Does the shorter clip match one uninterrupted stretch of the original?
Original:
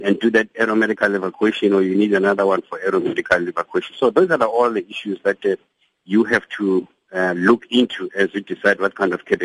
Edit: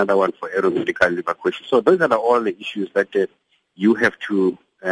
yes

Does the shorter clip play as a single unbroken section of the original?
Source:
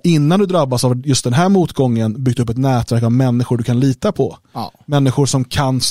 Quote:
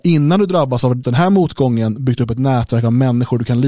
no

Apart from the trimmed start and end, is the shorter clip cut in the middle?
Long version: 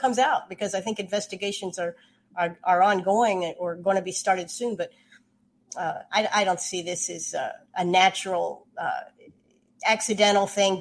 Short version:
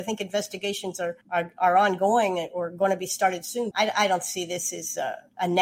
yes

